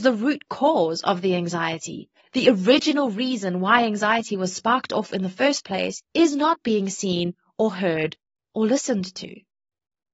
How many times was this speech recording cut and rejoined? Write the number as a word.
one